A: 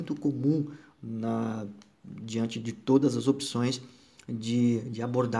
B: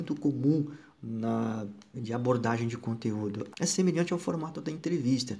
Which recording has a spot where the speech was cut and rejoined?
B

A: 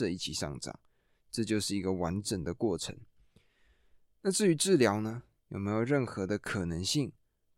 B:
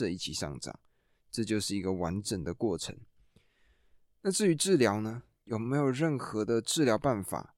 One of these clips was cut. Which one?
A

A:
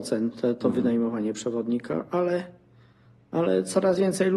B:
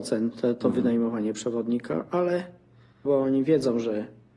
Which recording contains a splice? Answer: B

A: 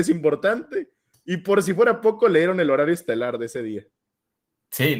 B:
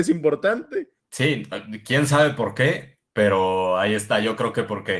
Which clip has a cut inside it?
B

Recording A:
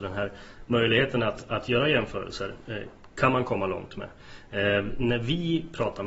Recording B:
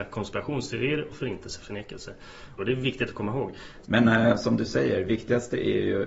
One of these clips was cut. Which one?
B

